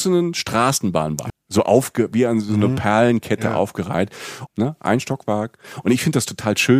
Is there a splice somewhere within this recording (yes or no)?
yes